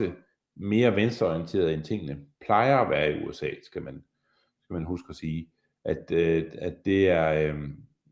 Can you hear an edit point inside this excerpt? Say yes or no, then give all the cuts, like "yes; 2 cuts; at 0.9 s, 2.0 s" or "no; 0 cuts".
no; 0 cuts